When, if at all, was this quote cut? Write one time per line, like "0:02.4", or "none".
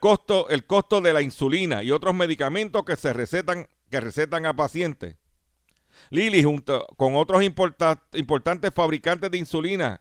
none